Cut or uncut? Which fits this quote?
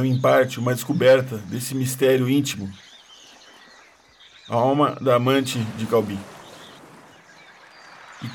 uncut